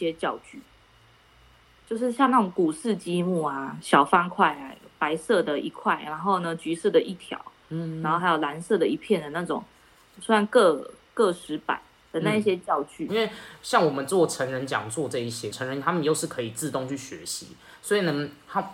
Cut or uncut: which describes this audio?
cut